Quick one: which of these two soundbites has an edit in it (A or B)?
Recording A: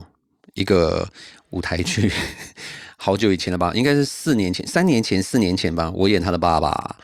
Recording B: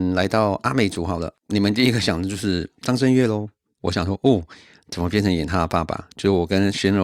B